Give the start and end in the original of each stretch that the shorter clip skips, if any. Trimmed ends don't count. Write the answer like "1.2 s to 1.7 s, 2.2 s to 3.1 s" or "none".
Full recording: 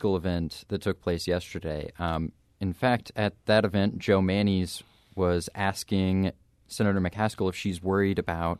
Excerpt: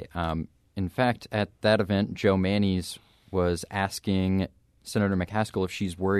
none

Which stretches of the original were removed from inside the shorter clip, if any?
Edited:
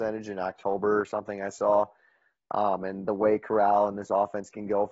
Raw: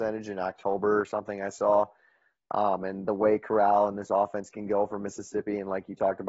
none

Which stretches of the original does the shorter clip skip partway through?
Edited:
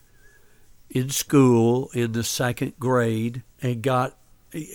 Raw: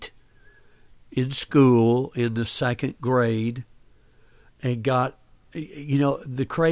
3.7 s to 4.5 s

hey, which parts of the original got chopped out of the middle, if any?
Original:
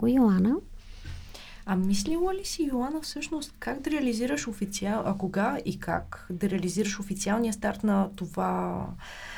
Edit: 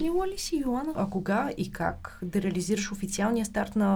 3.0 s to 5.0 s

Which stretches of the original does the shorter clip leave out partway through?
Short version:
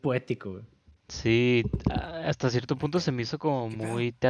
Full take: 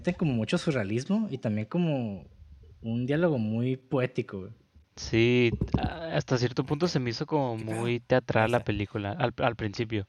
none

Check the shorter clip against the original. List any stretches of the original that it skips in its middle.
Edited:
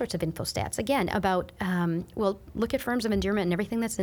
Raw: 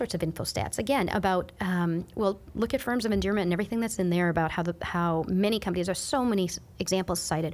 none

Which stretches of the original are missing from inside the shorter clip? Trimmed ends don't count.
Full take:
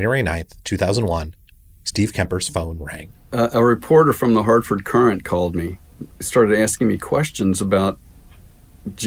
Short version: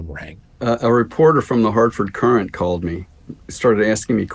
none

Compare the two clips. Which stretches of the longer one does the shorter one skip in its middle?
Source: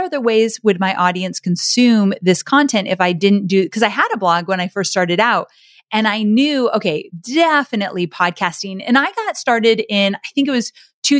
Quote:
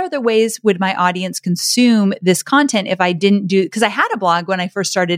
none

